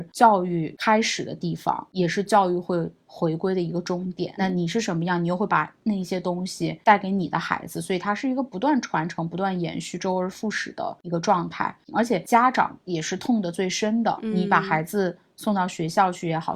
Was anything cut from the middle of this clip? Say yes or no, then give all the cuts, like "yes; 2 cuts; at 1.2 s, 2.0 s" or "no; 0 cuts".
yes; 1 cut; at 4.4 s